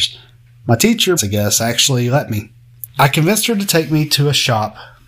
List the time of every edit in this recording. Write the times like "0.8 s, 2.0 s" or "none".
1.2 s, 2.9 s